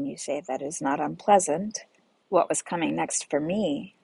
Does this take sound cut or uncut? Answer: cut